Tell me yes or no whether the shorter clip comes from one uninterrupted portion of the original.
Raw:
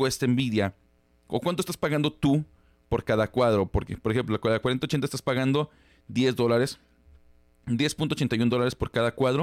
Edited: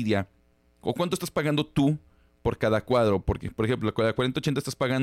yes